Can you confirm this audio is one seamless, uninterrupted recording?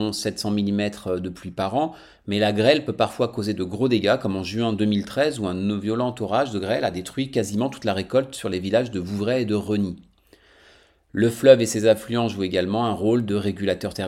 yes; 0 cuts

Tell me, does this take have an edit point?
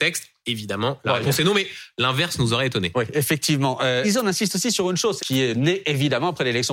yes; 2 cuts; at 4.0 s, 5.2 s

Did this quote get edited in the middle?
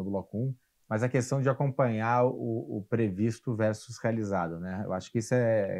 no; 0 cuts

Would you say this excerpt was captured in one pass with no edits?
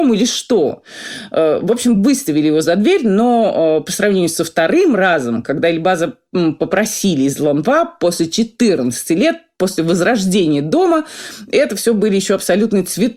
yes; 0 cuts

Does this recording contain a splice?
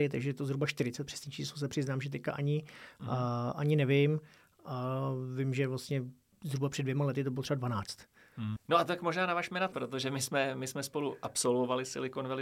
yes; 2 cuts; at 8.6 s, 9.7 s

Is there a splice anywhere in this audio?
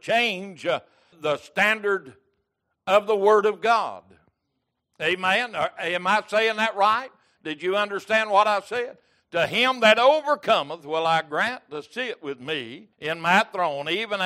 yes; 3 cuts; at 1.1 s, 9.2 s, 12.9 s

